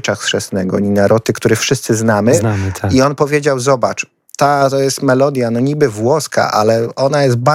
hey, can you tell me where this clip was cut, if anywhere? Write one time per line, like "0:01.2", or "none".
none